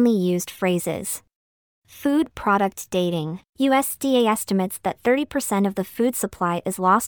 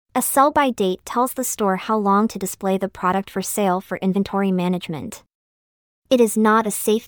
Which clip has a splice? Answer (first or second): first